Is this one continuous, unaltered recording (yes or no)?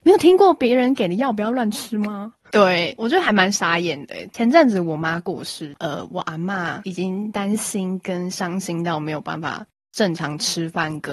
no